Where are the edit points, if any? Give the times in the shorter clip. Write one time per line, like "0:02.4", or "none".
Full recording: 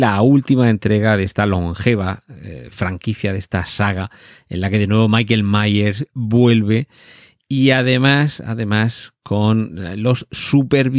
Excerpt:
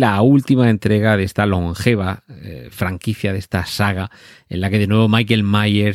none